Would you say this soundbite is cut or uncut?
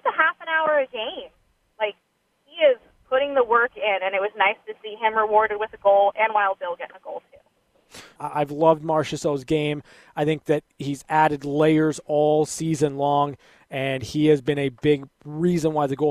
cut